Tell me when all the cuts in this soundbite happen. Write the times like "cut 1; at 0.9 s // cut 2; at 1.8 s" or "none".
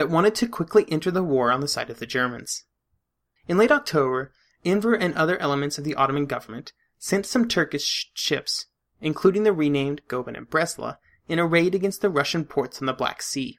cut 1; at 3.4 s